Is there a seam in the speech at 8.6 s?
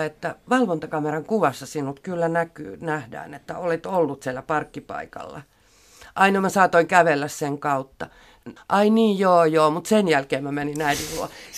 yes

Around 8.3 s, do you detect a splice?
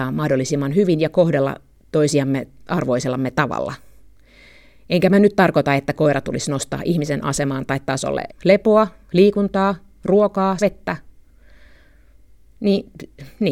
yes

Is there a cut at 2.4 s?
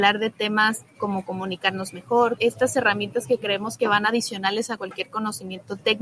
yes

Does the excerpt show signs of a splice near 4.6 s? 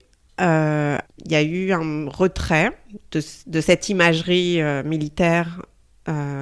no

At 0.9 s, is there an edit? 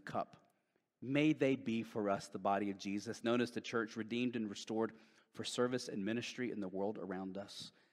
no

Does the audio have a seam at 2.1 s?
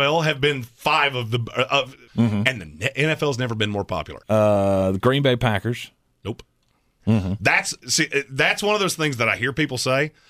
yes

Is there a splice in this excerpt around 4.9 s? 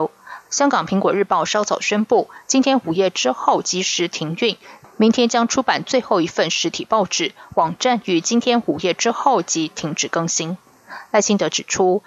no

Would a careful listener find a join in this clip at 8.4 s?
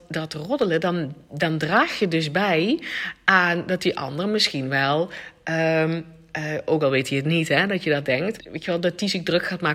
yes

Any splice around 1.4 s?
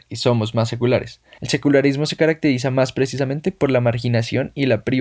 yes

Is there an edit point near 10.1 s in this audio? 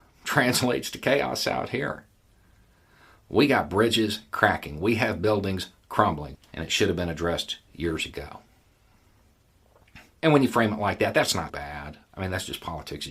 yes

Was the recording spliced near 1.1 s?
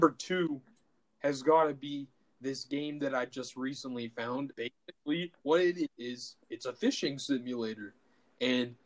no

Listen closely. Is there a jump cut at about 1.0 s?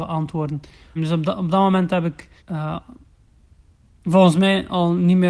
yes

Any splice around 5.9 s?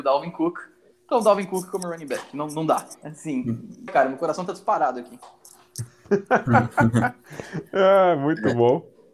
no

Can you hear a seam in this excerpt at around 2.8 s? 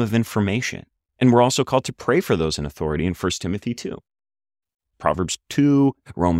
no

